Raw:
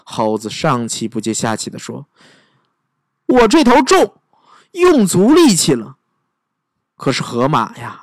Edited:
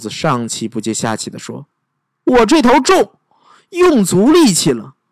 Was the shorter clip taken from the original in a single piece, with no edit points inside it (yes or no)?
no